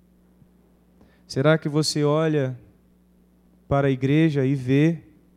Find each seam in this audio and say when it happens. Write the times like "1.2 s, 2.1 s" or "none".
none